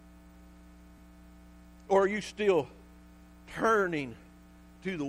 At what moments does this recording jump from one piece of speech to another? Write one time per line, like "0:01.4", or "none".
none